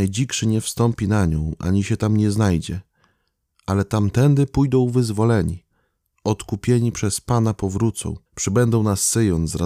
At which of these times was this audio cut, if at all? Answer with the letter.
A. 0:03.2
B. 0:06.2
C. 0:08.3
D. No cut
C